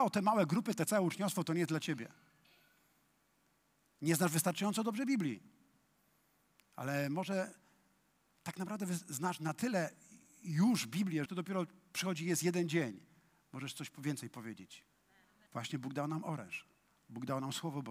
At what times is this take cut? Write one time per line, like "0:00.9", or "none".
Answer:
0:11.3
0:15.5